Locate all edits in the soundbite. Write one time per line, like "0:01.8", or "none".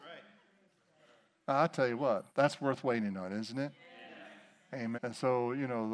0:02.3
0:04.9